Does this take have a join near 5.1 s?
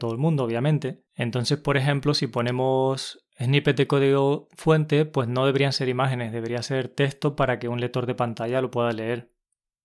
no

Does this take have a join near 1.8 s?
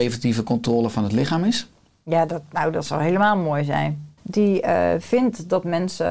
no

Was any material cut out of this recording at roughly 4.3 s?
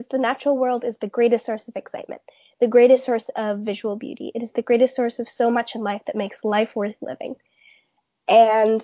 no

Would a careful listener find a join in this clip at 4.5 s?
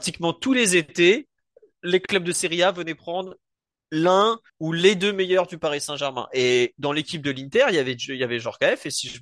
yes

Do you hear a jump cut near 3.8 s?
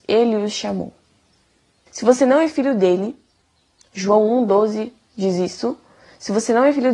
no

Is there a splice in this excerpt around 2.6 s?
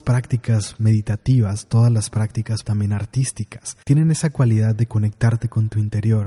yes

